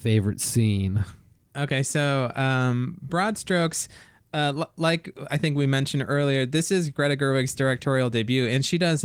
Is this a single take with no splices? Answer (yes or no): yes